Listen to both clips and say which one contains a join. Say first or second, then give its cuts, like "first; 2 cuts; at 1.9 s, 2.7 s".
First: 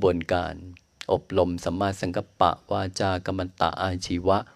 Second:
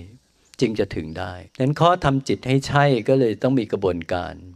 second; 1 cut; at 1.5 s